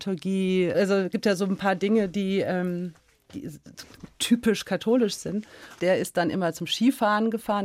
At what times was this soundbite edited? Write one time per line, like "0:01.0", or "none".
0:05.8